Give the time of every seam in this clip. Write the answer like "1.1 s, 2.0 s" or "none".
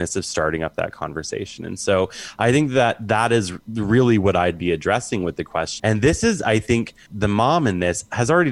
5.8 s, 7.1 s